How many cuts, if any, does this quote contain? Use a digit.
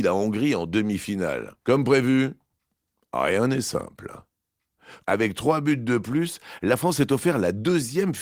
2